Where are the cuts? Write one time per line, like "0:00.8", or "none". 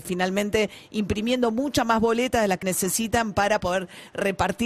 0:02.6